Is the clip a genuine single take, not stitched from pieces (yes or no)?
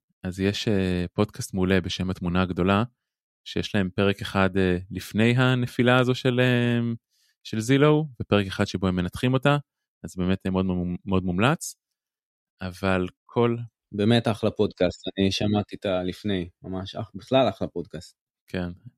yes